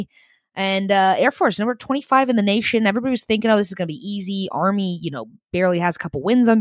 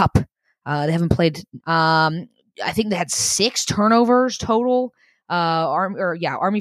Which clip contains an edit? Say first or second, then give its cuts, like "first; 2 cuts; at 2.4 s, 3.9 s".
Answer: second; 1 cut; at 1.6 s